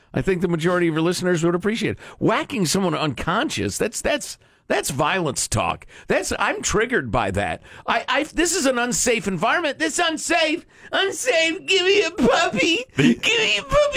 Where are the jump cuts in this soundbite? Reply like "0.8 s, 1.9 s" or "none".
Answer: none